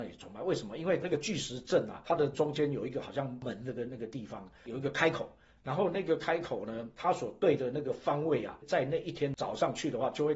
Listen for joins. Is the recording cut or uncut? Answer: uncut